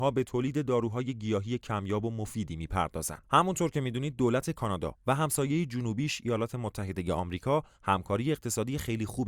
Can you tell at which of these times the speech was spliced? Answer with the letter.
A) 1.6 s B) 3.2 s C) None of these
B